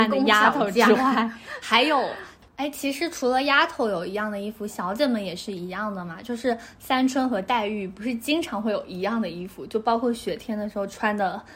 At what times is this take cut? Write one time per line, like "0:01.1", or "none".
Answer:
0:02.4